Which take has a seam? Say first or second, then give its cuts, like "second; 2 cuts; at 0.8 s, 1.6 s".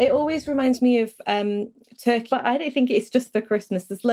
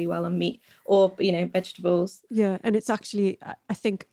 first; 1 cut; at 2.3 s